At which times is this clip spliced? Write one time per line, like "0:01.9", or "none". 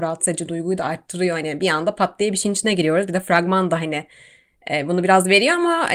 none